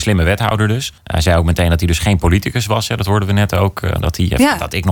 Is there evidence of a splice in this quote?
yes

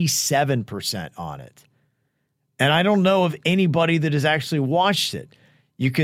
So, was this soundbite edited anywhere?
no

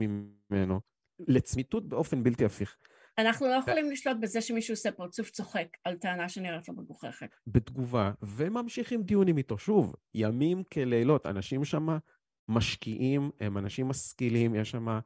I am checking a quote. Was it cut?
yes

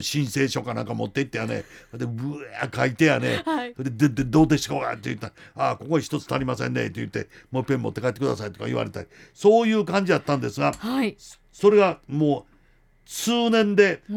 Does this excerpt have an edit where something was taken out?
yes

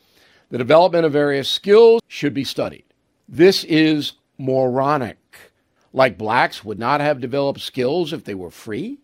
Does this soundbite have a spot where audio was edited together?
yes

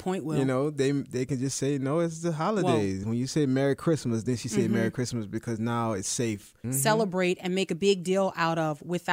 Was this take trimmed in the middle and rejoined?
yes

